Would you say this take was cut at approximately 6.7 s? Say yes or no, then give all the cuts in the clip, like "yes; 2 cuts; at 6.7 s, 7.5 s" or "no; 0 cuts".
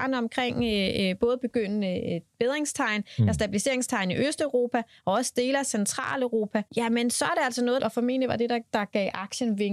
yes; 2 cuts; at 6.7 s, 7.8 s